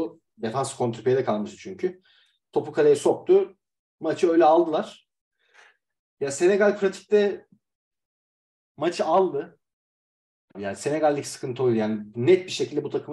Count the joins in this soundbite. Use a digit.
1